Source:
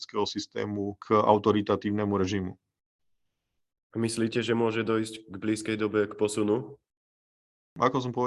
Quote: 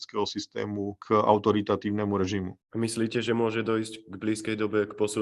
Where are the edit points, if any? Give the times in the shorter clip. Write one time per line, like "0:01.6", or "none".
0:02.6